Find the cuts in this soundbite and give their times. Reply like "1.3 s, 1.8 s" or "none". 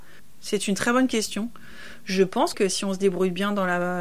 2.5 s